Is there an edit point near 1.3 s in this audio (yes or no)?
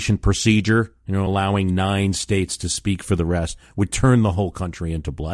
no